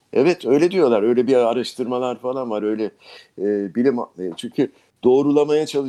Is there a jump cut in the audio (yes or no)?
no